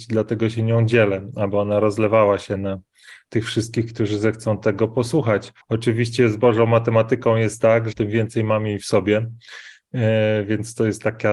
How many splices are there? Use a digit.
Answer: 2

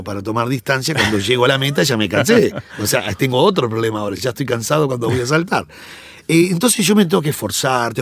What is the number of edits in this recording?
0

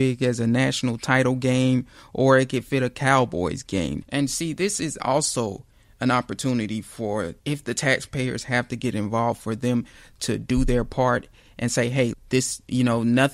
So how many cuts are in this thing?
3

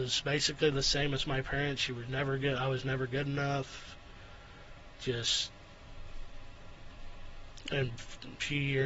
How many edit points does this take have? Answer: 0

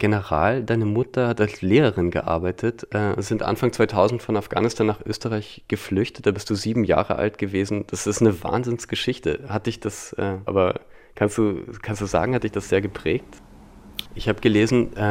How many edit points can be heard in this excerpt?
2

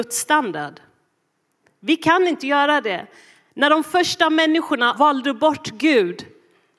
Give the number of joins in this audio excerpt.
1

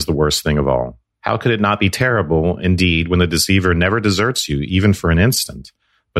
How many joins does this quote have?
0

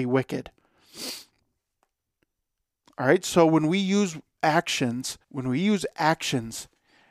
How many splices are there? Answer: 2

